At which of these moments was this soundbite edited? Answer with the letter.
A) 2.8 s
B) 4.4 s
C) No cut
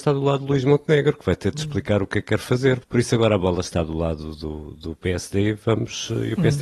A